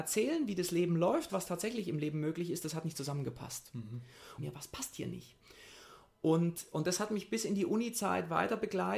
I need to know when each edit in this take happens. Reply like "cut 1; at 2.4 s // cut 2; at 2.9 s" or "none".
cut 1; at 1.3 s // cut 2; at 4.4 s